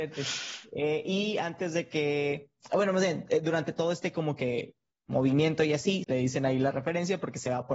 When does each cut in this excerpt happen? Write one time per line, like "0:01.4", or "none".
0:06.0